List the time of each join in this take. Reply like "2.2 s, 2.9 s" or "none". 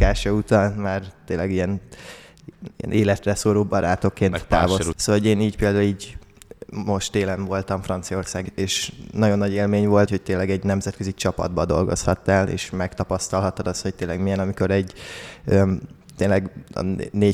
4.9 s, 8.5 s, 10.1 s